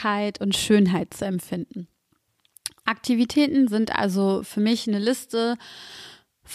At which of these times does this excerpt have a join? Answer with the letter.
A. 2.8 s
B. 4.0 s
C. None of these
A